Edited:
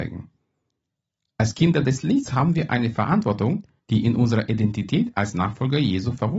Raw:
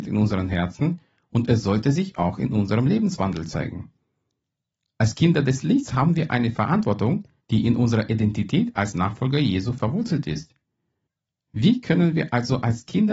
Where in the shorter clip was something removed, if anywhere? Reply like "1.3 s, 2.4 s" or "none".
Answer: none